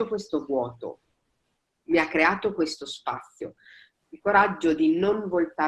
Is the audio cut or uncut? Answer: cut